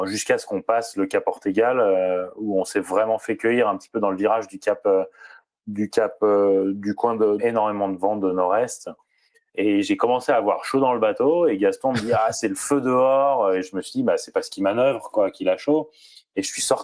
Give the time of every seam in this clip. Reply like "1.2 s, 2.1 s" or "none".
7.4 s, 9.5 s